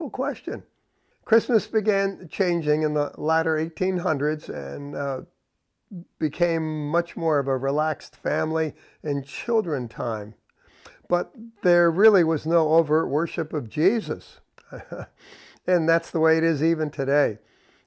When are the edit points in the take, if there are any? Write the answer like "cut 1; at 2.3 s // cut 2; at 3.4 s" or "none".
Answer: cut 1; at 1.1 s